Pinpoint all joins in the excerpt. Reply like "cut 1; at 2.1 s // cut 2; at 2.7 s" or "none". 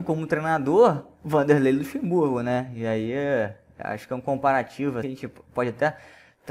cut 1; at 5.0 s